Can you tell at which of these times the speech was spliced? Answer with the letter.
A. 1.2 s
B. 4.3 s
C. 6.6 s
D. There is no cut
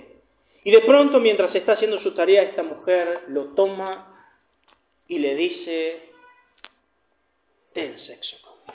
D